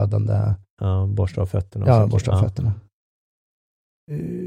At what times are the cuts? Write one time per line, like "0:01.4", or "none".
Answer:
none